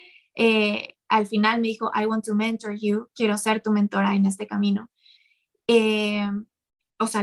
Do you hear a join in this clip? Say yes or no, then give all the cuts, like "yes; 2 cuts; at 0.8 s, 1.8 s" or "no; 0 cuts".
no; 0 cuts